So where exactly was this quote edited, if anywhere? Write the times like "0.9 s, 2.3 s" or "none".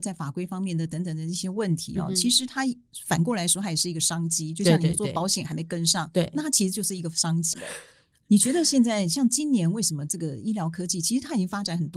7.5 s

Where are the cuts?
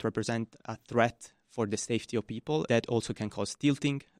2.7 s

